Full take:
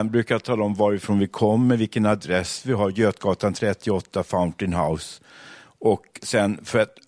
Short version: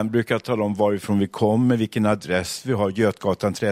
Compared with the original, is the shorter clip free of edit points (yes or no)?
yes